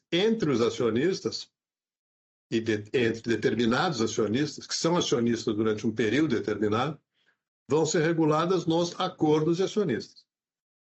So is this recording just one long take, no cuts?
yes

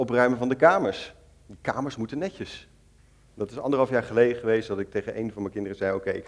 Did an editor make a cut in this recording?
yes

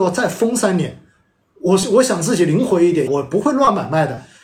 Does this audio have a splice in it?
yes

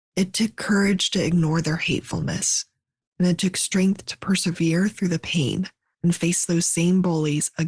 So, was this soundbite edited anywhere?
no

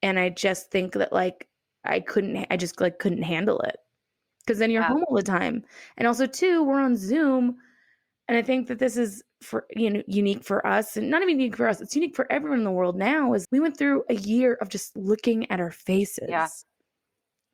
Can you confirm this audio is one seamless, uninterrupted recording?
no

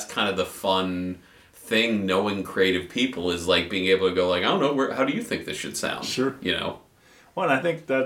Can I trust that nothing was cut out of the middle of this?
yes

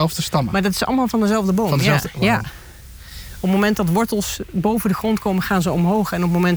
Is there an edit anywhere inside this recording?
no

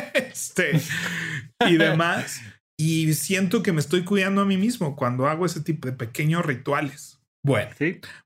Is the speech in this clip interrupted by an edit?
yes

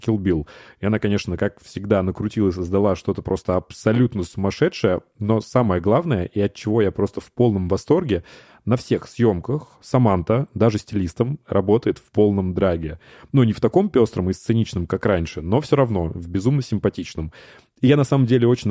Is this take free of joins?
yes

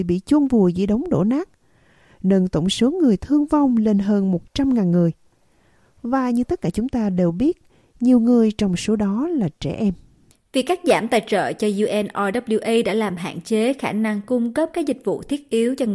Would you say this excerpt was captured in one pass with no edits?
yes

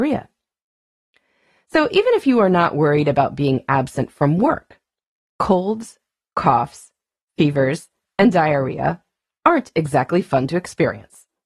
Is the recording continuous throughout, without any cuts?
yes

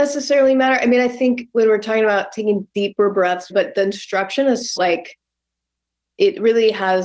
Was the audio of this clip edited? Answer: yes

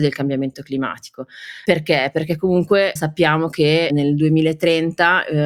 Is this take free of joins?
no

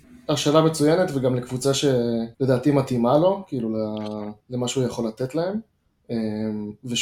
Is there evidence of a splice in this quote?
yes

